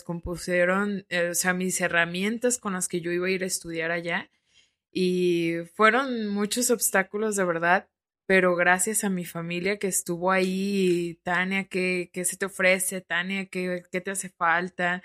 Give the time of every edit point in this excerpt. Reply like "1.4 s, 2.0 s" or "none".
none